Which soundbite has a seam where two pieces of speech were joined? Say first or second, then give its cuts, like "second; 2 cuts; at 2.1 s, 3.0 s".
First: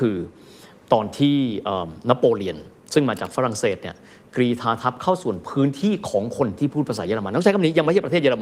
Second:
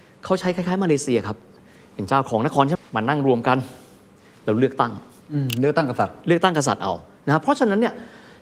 second; 1 cut; at 2.8 s